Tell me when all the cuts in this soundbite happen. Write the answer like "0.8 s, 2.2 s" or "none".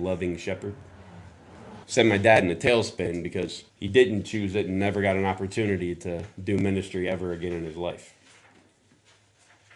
1.8 s, 3.7 s